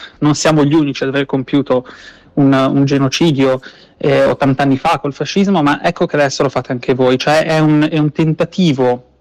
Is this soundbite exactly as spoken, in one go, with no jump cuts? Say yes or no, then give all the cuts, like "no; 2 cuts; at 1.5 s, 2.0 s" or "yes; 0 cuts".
yes; 0 cuts